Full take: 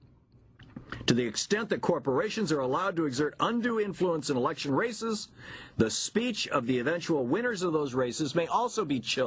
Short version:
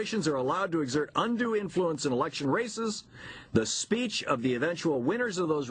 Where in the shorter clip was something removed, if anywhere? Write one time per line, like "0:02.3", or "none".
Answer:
none